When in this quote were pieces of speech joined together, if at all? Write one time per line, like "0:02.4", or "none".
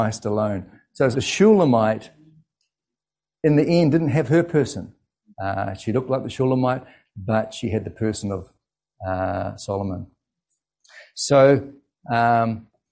0:01.1
0:05.3

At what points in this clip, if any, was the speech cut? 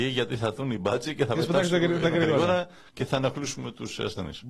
none

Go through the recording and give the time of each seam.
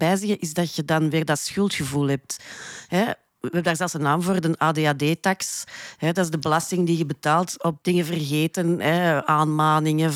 0:07.8

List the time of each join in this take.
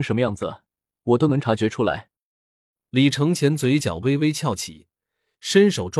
none

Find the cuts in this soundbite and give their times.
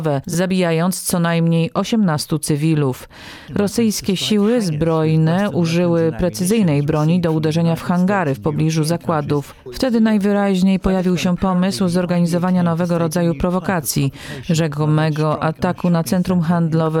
0:03.5
0:09.7

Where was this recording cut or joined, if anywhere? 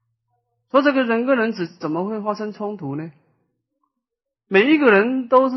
none

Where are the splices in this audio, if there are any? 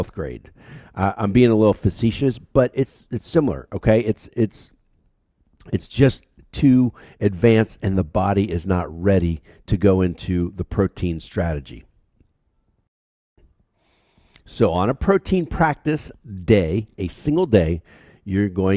none

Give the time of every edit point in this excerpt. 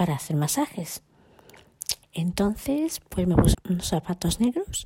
0:02.0
0:03.5

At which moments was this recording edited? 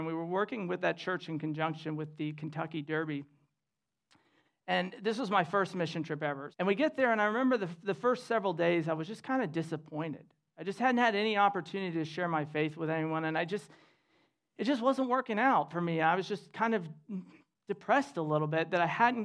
0:06.5

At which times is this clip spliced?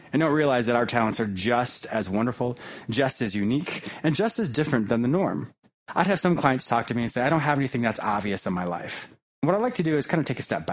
none

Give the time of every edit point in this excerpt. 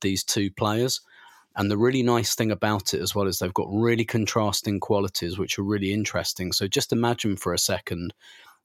none

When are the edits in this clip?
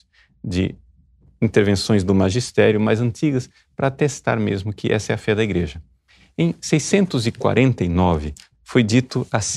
0:08.5

